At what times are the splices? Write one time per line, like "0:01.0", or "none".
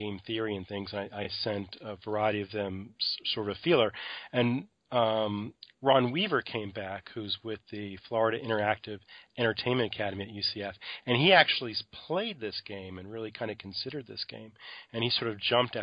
none